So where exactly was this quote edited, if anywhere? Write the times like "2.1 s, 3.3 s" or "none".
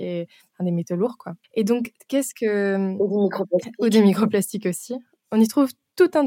1.4 s